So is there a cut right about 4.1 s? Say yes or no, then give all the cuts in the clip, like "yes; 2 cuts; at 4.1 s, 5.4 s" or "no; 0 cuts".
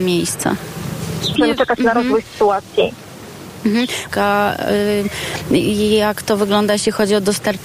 yes; 2 cuts; at 1.3 s, 4.1 s